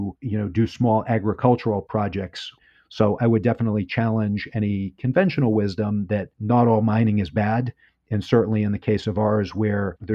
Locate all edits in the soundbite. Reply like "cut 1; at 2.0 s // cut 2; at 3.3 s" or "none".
cut 1; at 3.2 s